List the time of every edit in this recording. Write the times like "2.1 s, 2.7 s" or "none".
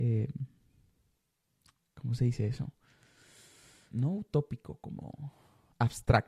3.9 s